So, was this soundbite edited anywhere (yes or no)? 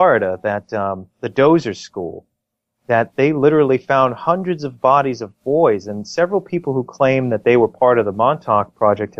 no